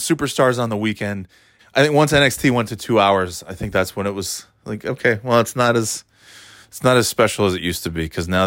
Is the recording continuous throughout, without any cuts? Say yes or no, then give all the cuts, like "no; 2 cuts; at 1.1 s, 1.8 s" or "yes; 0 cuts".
no; 1 cut; at 1.6 s